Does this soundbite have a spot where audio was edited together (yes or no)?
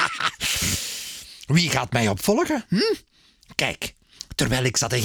no